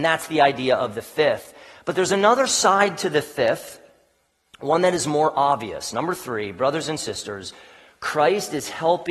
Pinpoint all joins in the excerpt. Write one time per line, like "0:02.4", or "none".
none